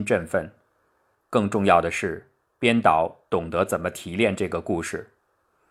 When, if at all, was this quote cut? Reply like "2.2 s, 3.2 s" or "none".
1.1 s